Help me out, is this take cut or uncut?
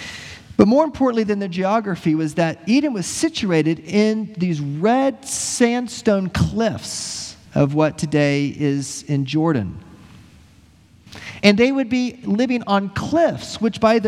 cut